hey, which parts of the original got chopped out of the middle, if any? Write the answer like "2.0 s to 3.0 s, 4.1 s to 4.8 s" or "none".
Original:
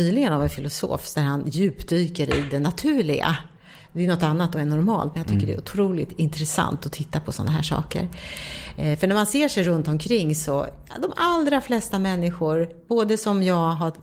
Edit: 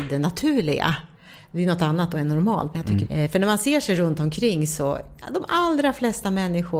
5.5 s to 8.7 s